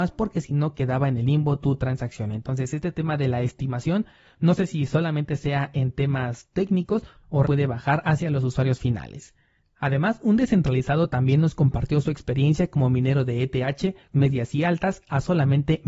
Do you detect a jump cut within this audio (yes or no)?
yes